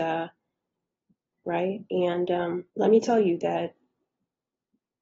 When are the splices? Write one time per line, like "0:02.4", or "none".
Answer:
0:01.3
0:02.7

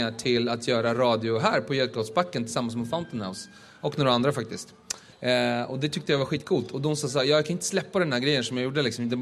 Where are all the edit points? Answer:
0:05.1

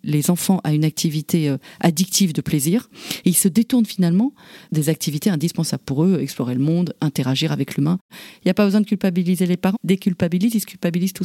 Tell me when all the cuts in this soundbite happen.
0:08.1
0:09.7

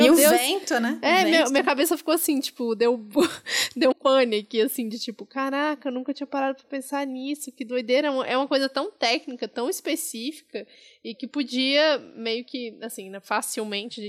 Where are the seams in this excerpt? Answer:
0:03.9

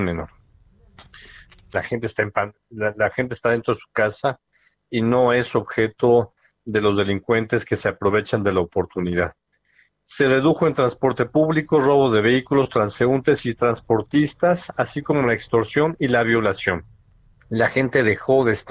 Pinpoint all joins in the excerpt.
0:01.7
0:17.4

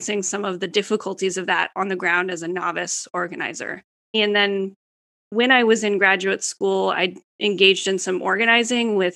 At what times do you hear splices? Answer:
0:04.1
0:07.3

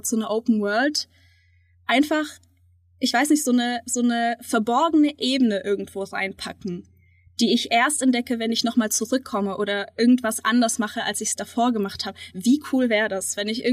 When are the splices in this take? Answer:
none

